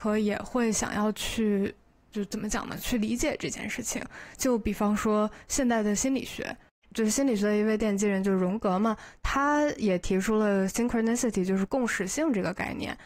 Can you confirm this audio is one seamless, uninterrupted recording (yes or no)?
yes